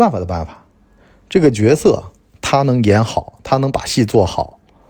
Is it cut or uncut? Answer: uncut